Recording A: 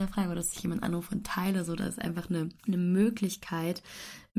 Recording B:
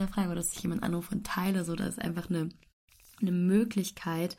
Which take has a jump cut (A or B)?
A